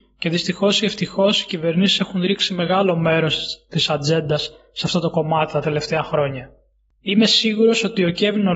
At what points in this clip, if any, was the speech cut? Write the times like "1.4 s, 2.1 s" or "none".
none